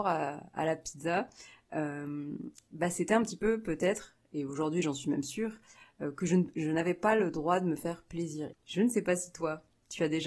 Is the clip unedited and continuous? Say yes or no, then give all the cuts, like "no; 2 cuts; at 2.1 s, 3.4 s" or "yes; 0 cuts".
no; 1 cut; at 8.5 s